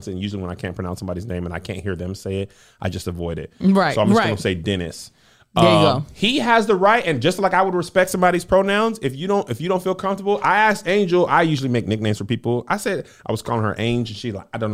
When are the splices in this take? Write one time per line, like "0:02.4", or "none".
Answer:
none